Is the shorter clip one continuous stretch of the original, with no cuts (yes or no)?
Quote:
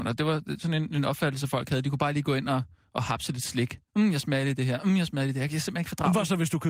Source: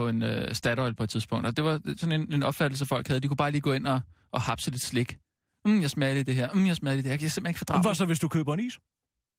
no